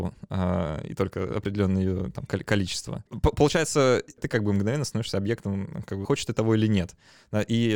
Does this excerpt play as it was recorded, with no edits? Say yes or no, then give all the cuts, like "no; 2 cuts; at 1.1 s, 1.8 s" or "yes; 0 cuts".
no; 3 cuts; at 3.1 s, 4.2 s, 6.0 s